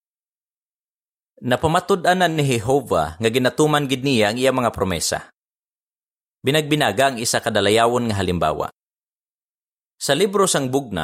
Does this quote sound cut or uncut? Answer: uncut